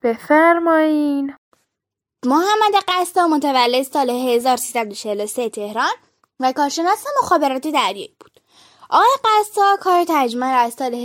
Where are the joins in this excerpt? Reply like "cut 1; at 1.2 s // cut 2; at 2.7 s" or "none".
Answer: none